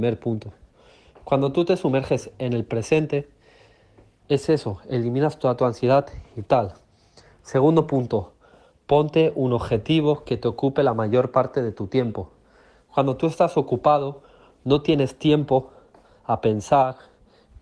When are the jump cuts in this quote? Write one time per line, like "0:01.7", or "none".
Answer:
none